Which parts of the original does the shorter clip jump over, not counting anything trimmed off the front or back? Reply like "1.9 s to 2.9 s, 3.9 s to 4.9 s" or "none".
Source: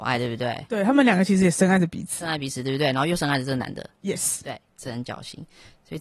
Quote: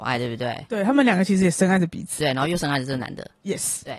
2.2 s to 2.8 s